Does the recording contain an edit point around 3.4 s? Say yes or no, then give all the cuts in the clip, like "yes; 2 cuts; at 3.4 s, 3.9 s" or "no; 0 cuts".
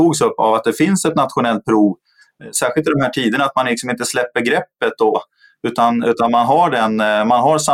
no; 1 cut; at 5.1 s